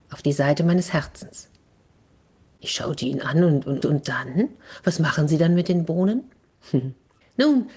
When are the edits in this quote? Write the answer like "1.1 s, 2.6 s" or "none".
3.8 s